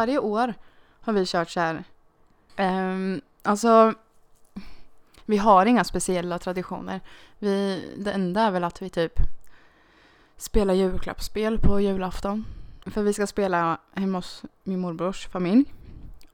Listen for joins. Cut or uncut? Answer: cut